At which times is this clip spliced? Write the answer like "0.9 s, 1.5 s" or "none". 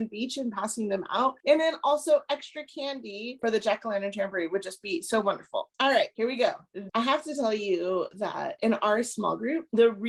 5.7 s, 6.9 s